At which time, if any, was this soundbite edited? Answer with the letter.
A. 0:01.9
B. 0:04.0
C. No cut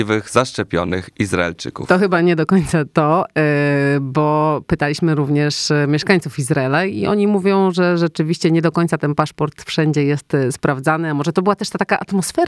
C